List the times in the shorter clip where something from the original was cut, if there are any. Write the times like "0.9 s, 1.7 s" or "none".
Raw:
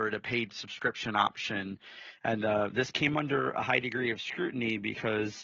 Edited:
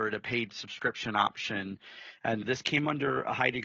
2.4 s